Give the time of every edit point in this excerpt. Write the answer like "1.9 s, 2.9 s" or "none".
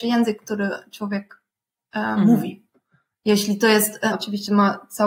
4.1 s